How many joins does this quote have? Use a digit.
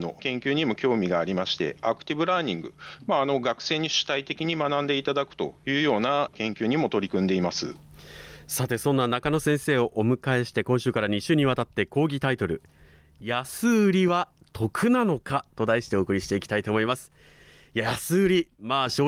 0